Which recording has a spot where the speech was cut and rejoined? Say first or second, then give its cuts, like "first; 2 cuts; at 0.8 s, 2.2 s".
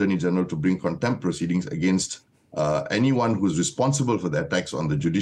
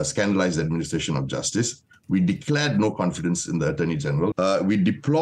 second; 2 cuts; at 1.9 s, 4.3 s